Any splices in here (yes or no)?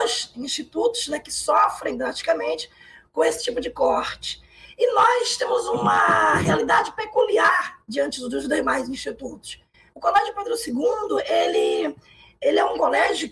yes